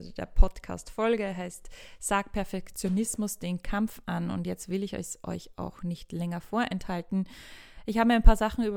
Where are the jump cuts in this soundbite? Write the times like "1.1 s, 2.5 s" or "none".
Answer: none